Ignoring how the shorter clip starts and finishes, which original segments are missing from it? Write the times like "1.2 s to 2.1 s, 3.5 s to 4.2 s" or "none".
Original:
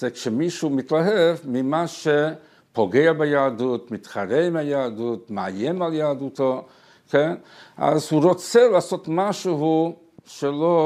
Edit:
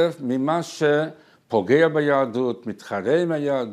none